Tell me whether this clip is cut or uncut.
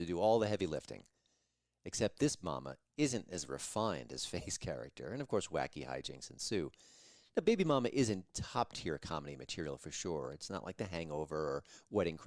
uncut